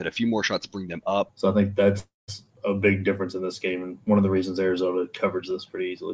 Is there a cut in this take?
yes; 1 cut; at 1.3 s

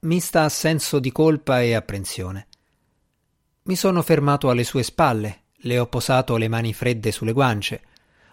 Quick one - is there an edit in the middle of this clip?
no; 0 cuts

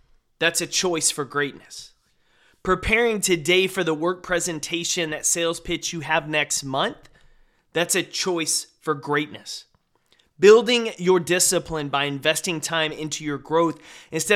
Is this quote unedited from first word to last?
yes; 0 cuts

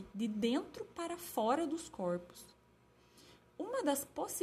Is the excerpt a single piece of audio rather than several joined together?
yes; 0 cuts

